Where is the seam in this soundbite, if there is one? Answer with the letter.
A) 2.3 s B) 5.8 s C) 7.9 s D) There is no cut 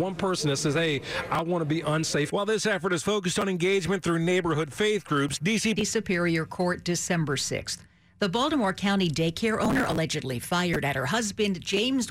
B